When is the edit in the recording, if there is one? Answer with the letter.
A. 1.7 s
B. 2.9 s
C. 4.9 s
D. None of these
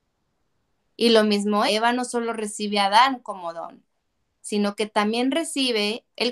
A